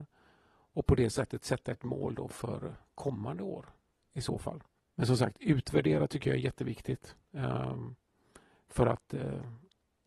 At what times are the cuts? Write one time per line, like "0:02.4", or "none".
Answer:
0:04.8